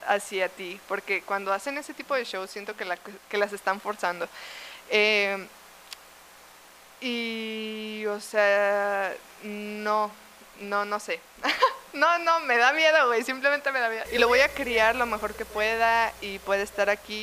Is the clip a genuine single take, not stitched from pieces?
no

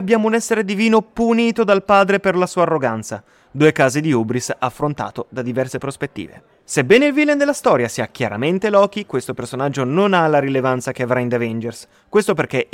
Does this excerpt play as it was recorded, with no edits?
yes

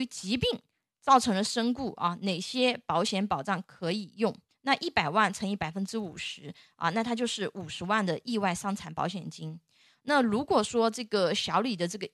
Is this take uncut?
no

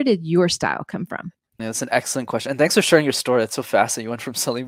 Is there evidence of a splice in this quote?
yes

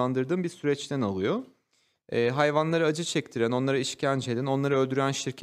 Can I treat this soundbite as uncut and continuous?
yes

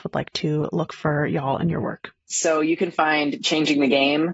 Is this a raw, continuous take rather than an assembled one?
yes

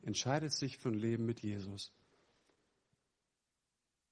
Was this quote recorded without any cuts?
yes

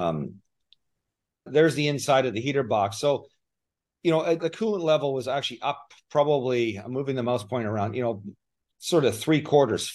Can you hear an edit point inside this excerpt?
no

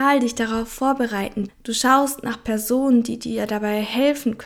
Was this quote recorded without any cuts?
no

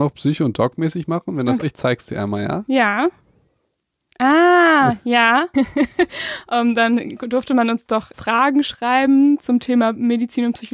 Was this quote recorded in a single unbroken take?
no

